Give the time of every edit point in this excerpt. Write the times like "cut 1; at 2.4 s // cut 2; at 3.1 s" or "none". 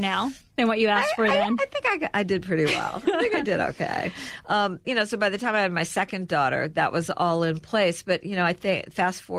cut 1; at 4.8 s